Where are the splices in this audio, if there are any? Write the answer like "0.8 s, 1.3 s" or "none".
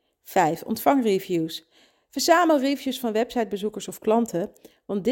none